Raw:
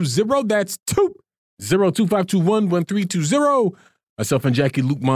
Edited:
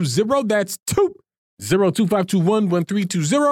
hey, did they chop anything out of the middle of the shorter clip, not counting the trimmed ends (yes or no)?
no